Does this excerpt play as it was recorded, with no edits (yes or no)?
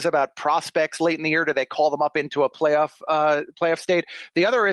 yes